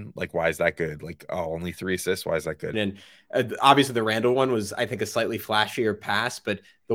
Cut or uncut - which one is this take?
cut